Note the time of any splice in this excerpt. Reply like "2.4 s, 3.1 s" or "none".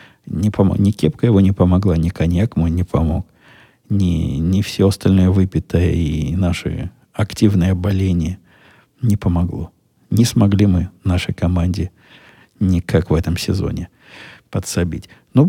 none